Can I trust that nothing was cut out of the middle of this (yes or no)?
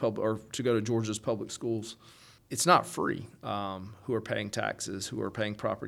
no